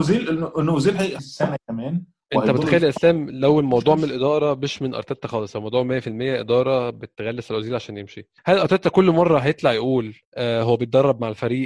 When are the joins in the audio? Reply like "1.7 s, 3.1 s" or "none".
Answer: 1.2 s, 8.4 s, 10.2 s